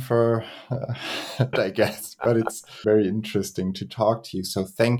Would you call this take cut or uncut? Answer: cut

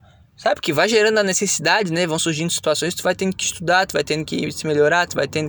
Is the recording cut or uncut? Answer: cut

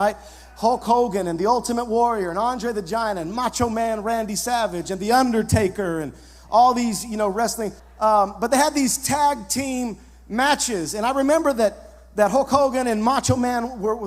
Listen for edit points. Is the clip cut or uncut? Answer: cut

